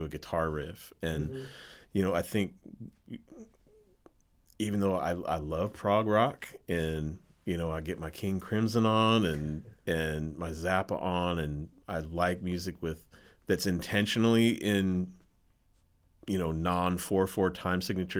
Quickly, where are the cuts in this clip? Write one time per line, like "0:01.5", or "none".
none